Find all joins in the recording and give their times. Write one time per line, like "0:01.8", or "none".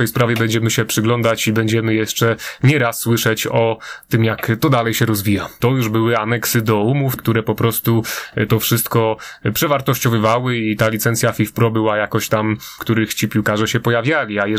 0:05.6
0:07.2
0:12.8